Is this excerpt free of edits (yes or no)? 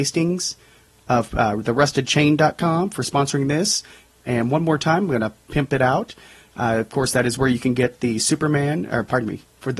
yes